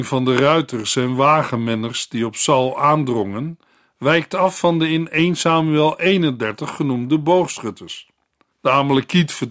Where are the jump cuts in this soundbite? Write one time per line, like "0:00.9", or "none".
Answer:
0:08.5